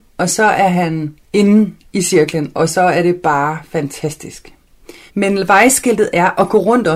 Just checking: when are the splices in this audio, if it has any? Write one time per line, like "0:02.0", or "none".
0:01.2
0:05.1